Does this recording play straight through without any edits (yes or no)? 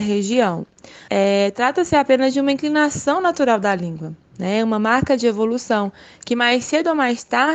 no